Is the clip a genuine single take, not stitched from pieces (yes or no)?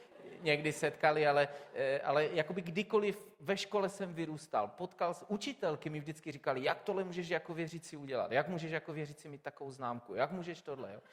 yes